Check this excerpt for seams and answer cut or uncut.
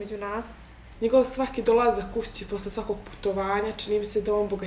cut